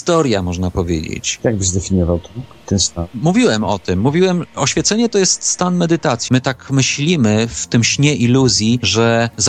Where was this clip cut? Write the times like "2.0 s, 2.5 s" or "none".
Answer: 1.4 s, 6.3 s